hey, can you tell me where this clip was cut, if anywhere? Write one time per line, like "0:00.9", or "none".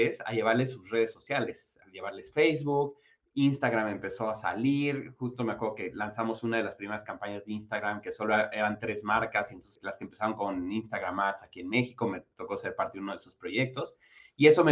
0:09.8

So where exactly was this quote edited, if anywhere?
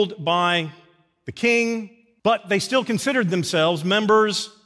0:02.2

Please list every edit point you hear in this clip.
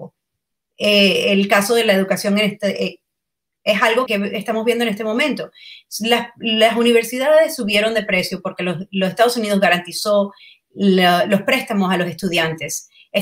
0:04.1

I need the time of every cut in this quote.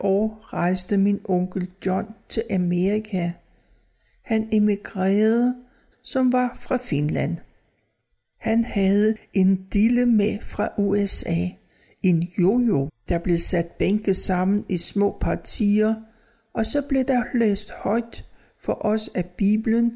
0:05.9
0:12.9

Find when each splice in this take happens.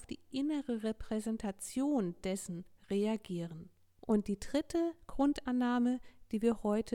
0:04.0

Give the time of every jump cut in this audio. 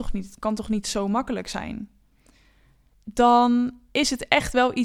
0:02.9

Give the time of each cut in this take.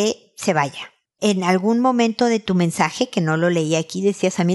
none

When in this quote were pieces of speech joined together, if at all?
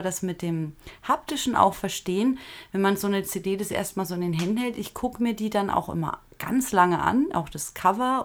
none

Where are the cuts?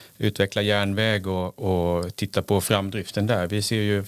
none

